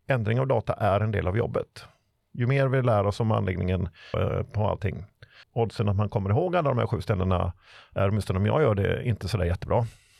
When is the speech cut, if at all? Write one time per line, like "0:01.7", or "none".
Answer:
0:04.1
0:05.4